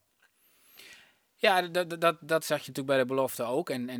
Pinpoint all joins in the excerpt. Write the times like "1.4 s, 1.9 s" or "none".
none